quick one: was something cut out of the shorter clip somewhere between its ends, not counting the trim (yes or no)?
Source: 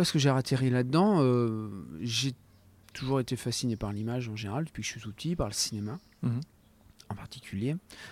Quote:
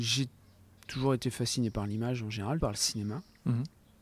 yes